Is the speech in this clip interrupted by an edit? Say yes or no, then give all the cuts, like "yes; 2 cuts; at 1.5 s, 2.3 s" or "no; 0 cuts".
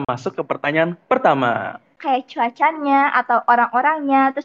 yes; 1 cut; at 2.0 s